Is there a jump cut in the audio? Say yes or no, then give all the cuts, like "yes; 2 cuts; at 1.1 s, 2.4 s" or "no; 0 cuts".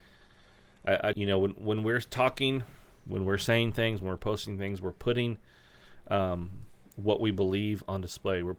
yes; 1 cut; at 1.1 s